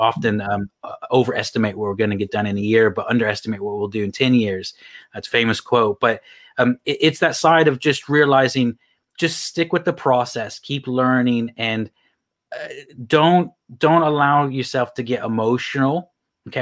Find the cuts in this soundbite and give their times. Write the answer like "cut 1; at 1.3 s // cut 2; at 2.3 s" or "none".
none